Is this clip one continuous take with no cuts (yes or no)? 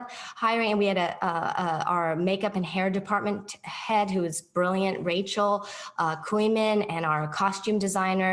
yes